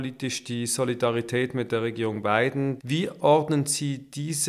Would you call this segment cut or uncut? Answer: cut